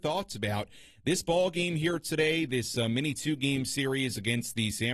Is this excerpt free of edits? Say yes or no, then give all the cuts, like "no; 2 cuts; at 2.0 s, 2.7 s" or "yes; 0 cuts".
yes; 0 cuts